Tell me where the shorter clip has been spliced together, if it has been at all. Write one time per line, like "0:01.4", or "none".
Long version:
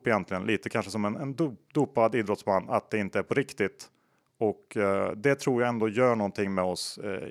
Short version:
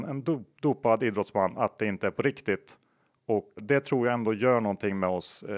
0:03.6